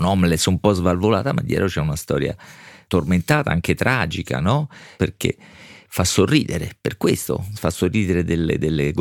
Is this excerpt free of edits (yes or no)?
no